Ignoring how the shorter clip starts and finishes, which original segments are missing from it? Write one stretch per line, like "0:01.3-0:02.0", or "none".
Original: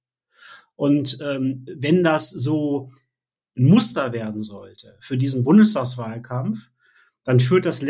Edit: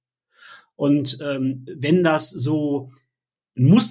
none